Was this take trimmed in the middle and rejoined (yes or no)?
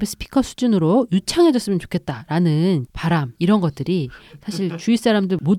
yes